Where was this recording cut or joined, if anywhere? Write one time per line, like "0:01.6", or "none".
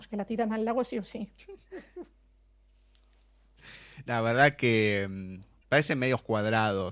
none